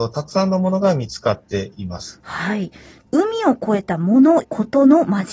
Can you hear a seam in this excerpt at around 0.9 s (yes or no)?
no